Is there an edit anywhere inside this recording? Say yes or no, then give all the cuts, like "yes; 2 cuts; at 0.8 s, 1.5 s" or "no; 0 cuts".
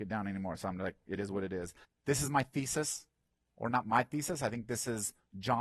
yes; 1 cut; at 1.8 s